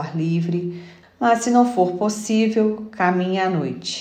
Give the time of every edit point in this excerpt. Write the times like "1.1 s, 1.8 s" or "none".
1.0 s